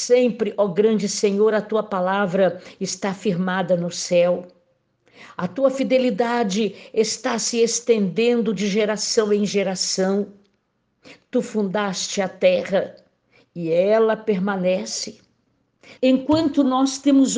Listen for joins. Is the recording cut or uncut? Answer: cut